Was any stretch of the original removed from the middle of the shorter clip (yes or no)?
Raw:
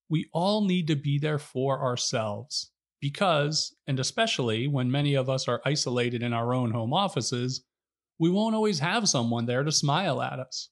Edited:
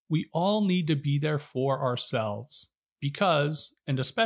no